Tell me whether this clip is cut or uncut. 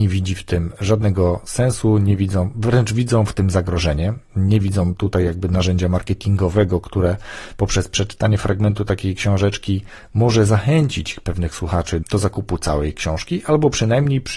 cut